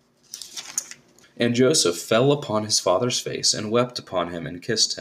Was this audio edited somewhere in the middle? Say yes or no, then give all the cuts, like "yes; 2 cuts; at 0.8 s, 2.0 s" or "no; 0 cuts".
yes; 1 cut; at 1.2 s